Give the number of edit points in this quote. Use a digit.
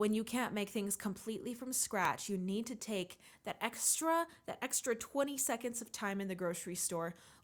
0